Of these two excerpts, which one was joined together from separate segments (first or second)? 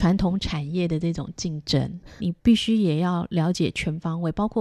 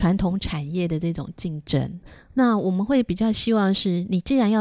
first